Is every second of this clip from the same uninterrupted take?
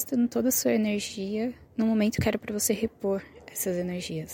no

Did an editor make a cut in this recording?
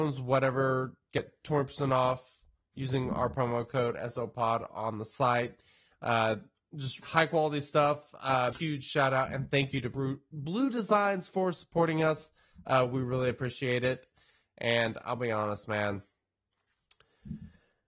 yes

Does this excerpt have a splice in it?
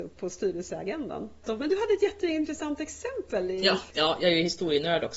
yes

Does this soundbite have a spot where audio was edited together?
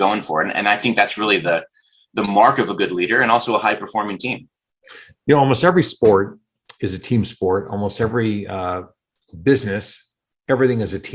no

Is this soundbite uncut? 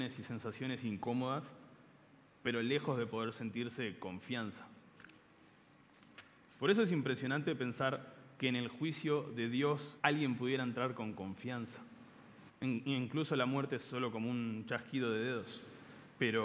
no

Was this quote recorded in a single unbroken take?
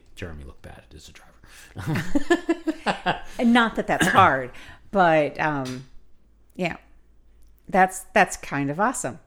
yes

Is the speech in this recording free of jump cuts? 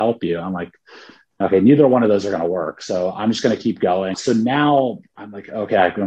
no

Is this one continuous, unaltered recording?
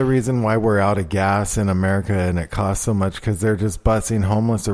yes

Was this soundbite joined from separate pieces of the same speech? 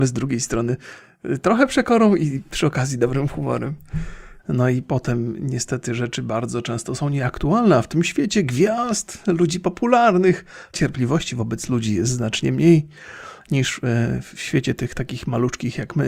yes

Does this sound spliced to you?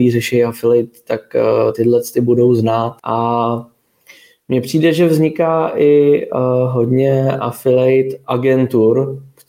yes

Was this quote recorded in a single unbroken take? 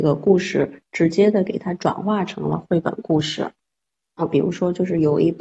yes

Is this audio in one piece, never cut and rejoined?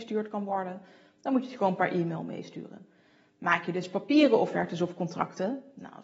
yes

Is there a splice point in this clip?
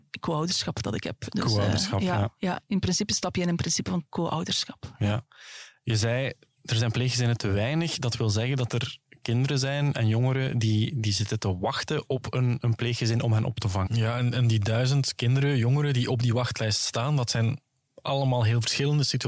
yes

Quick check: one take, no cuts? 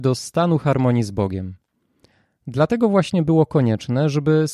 yes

